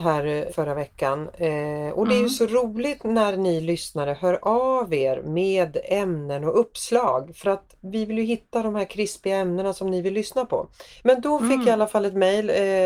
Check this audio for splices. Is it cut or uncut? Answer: uncut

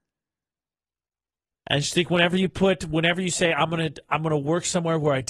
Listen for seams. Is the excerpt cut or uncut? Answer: cut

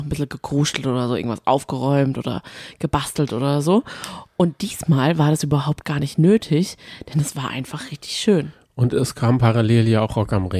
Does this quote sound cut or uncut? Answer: uncut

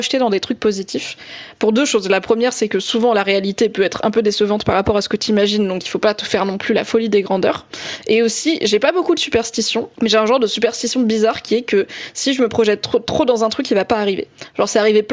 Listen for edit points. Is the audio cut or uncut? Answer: cut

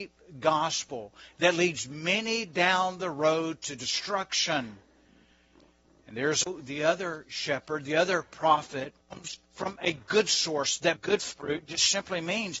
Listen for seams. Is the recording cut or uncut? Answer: cut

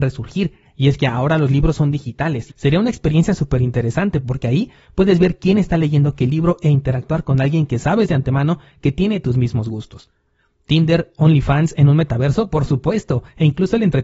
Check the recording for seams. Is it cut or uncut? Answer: cut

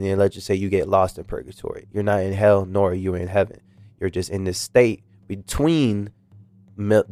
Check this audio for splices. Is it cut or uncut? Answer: uncut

